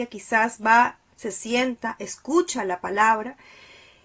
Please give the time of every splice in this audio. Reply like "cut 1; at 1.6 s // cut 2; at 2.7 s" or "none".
none